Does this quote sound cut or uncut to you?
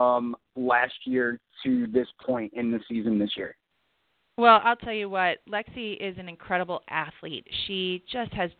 uncut